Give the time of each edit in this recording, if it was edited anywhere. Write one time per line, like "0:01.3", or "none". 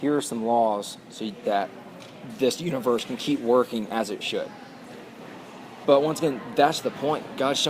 0:05.8

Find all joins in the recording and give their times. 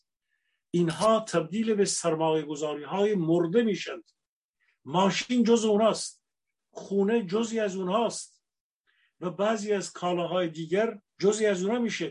0:11.1

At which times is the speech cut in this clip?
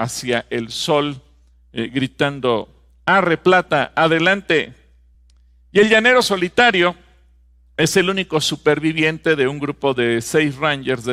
none

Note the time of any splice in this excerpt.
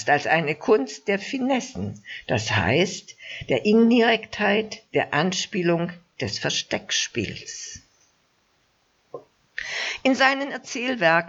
none

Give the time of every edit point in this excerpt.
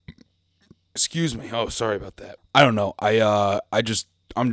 0:02.4

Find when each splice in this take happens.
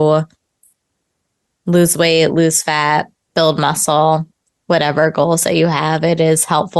0:03.2

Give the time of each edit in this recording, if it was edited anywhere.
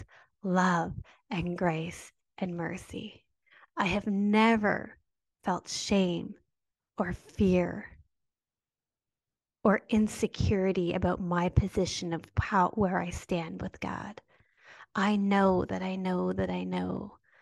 none

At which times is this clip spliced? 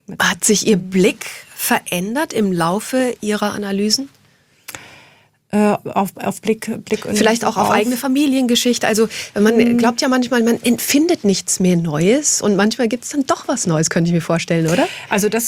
none

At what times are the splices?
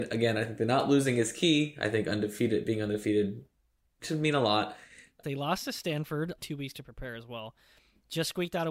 0:05.2
0:06.4

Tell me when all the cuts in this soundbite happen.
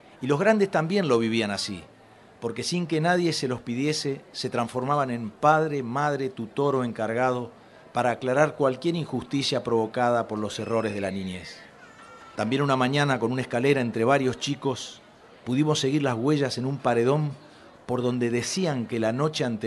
0:12.3

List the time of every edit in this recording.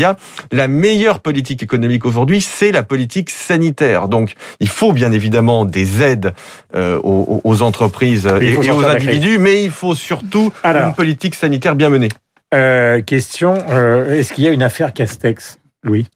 none

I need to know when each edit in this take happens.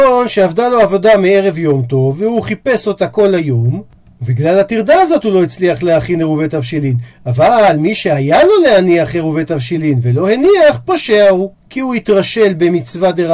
0:11.6

